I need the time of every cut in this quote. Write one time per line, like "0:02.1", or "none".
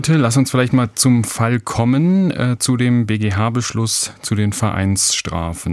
none

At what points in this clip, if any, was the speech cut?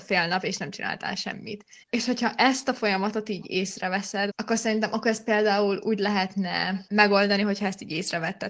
0:01.8
0:04.3

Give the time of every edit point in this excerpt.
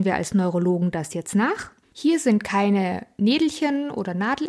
0:01.8

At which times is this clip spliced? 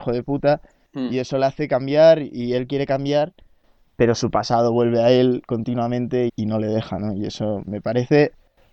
0:06.3
0:07.6

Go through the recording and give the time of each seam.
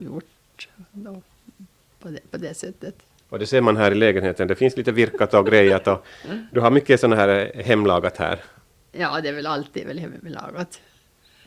none

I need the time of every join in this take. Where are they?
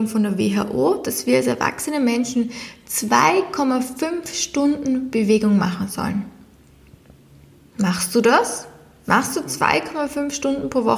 none

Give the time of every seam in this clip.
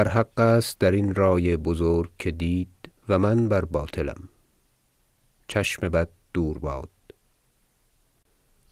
0:03.0

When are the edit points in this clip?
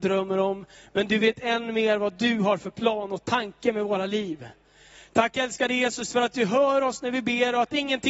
none

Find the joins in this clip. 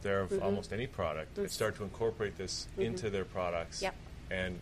0:01.5

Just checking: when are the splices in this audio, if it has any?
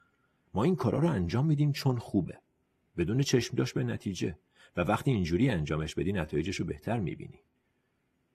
none

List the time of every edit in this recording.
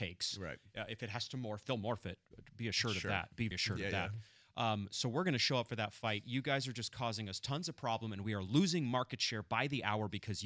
0:03.5

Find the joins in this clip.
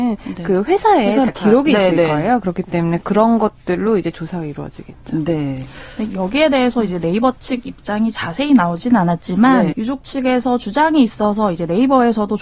0:01.3
0:09.7

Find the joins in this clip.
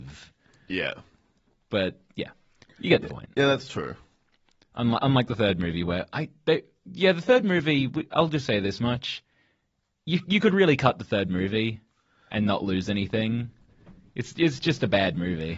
none

